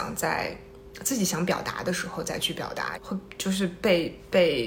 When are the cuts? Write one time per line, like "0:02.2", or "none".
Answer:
0:02.9